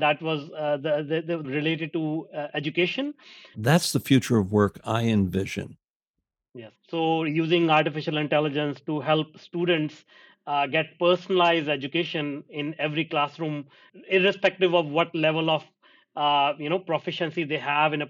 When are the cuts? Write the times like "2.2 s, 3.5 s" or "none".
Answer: 1.4 s, 3.5 s, 6.7 s